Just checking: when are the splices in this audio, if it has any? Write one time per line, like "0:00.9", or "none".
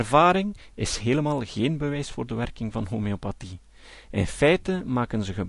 none